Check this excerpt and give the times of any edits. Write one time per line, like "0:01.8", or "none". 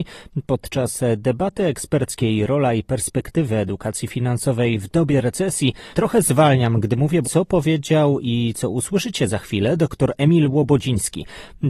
0:05.9
0:07.2